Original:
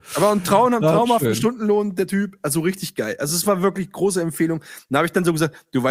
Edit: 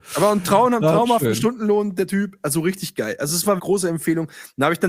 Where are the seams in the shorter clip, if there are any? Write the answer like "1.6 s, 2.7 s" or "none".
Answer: 3.6 s